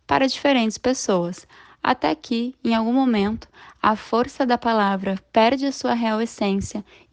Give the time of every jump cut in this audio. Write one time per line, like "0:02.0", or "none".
none

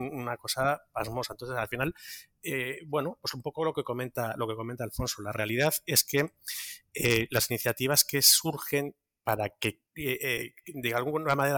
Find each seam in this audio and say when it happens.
0:09.9

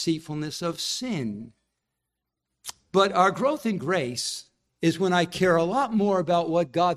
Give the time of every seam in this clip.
0:04.7

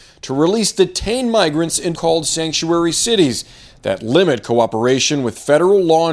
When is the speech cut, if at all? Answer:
0:01.9

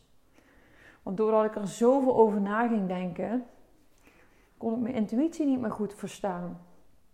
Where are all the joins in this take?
0:04.5

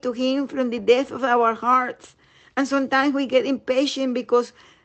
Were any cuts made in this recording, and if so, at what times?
none

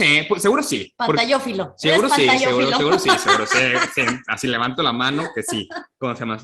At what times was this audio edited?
none

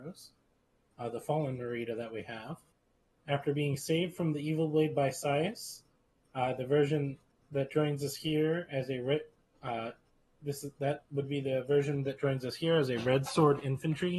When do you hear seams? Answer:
none

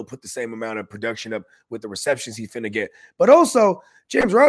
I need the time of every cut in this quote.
none

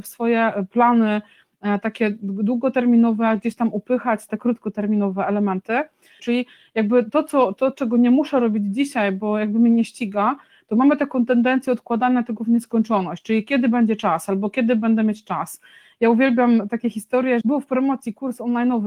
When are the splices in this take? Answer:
0:04.3
0:06.2
0:17.4

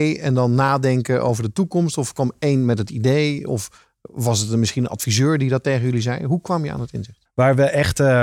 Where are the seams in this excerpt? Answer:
0:07.3

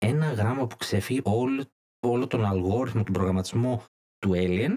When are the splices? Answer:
0:01.2
0:03.1

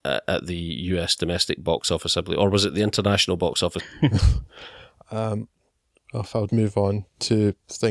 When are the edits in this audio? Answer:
0:03.8
0:06.5

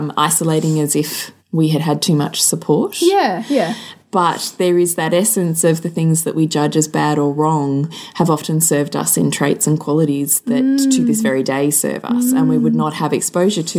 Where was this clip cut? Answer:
0:01.4

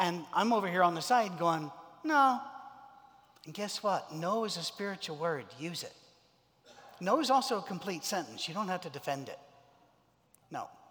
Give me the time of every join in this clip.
none

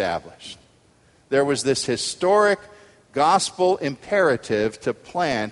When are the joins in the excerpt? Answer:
none

